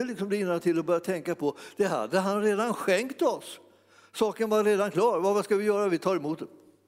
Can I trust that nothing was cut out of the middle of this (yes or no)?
yes